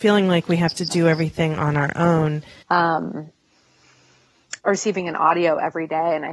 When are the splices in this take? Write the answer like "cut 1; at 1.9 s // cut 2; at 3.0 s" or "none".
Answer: cut 1; at 2.6 s // cut 2; at 4.6 s